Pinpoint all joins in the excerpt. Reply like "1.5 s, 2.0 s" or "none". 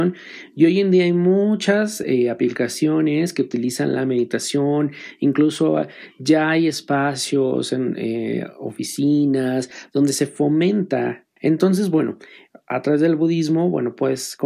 11.4 s